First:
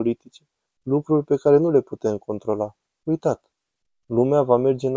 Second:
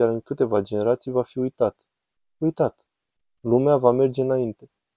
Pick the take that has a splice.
first; 1 cut; at 3.0 s

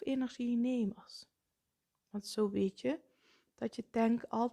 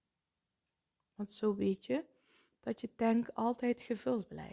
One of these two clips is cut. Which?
first; 1 cut; at 1.9 s

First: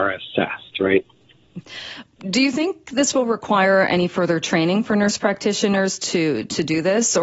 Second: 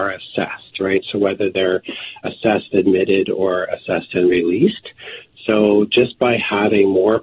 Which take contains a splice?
first; 1 cut; at 1.0 s

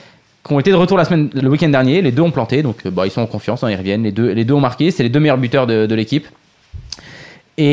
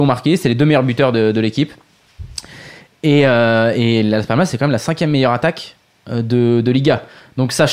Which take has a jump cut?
first; 1 cut; at 1.4 s

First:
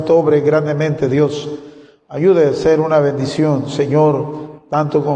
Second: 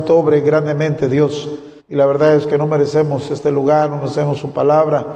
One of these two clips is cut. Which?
second; 1 cut; at 1.8 s

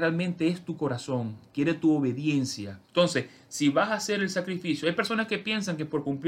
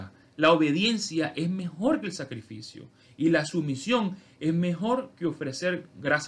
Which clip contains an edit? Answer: first; 1 cut; at 2.8 s

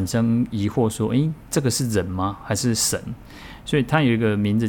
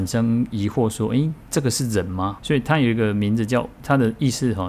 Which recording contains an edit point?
second; 1 cut; at 2.4 s

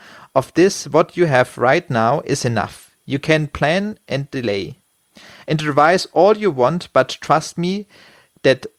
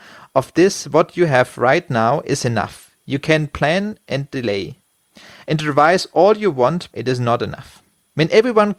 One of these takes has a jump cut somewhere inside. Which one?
second; 1 cut; at 6.9 s

